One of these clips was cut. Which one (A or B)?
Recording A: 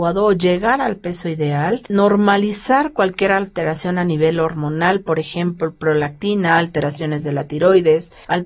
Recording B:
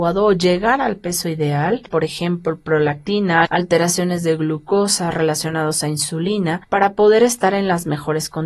B